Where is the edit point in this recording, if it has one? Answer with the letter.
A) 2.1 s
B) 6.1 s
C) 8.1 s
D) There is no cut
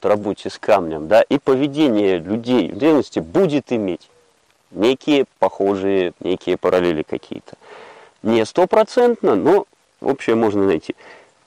B